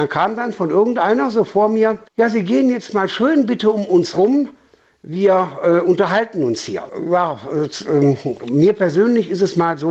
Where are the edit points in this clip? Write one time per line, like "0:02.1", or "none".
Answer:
0:02.1
0:06.9